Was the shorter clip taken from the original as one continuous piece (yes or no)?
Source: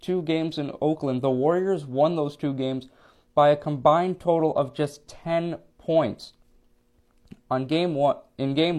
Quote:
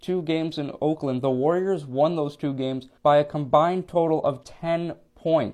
no